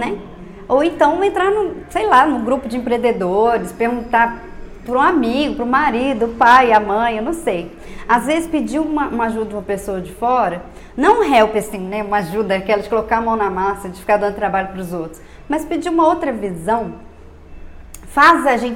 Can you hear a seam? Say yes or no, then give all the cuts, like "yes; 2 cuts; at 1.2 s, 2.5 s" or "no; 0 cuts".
no; 0 cuts